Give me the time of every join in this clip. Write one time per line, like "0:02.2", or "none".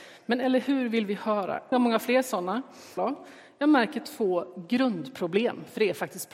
0:01.7
0:03.0